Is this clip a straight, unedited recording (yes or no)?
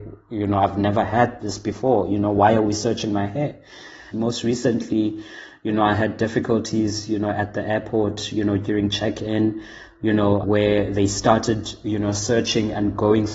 no